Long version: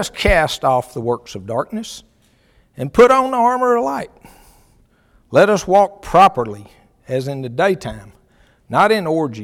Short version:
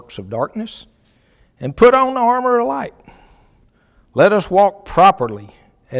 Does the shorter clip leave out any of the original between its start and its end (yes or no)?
no